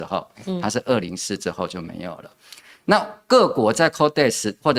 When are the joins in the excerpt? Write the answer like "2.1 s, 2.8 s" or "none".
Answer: 1.0 s

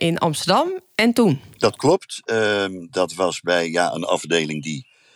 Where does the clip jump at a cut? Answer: none

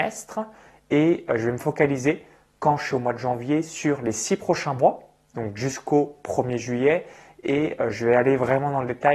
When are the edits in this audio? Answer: none

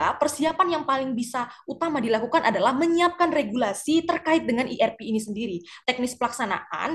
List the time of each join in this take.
5.8 s

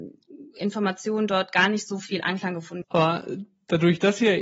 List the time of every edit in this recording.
2.8 s

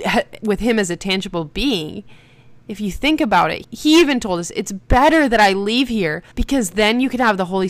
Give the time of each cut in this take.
3.6 s, 6.3 s

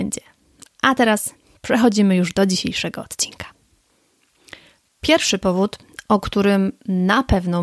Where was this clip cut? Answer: none

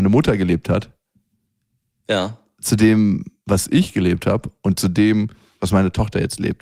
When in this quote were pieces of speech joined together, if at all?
none

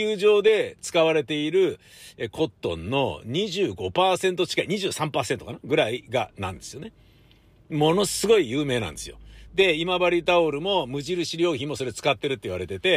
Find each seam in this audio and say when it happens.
9.5 s

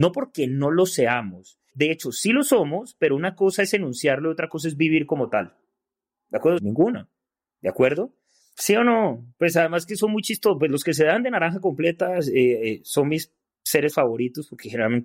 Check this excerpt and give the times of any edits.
1.7 s, 6.6 s, 8.5 s

